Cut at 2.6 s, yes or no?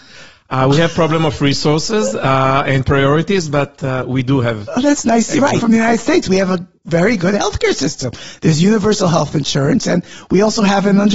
no